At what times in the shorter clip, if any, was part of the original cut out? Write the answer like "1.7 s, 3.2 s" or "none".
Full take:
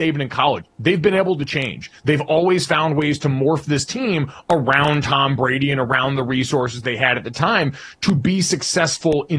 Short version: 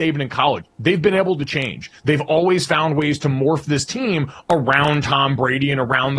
none

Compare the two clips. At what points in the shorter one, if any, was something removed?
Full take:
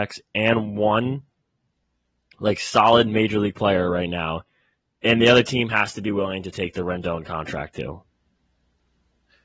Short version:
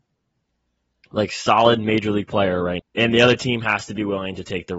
2.8 s

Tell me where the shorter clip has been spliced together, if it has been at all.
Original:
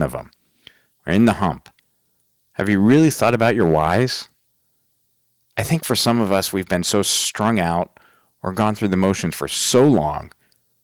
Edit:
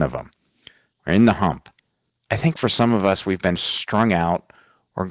2.1 s, 3.6 s

